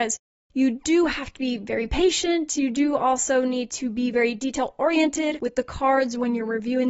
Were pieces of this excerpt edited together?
no; 0 cuts

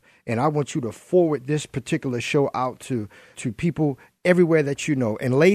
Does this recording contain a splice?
yes; 1 cut; at 3.3 s

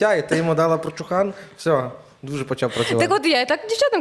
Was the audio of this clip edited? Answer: no; 0 cuts

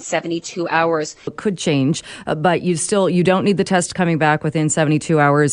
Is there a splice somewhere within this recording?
yes; 1 cut; at 1.3 s

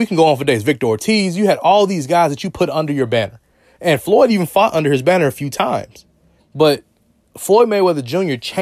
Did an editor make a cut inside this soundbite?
yes; 1 cut; at 6.4 s

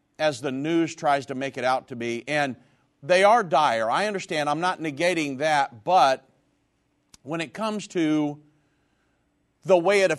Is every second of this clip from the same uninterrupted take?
yes; 0 cuts

